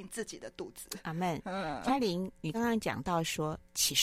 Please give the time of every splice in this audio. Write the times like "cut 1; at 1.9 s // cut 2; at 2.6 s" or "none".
cut 1; at 2.5 s